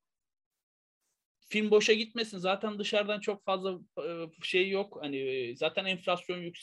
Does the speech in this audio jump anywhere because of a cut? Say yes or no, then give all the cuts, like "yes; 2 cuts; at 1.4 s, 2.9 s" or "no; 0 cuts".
yes; 1 cut; at 1.4 s